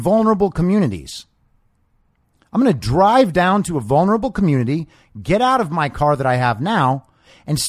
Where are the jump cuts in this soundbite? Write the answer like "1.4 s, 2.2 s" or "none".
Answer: none